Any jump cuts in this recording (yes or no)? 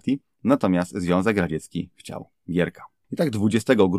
no